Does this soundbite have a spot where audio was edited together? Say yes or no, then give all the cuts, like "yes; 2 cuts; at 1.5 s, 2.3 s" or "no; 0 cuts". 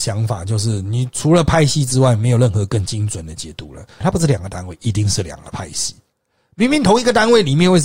yes; 1 cut; at 4.0 s